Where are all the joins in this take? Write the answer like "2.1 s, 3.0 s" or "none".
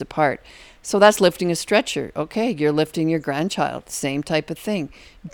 none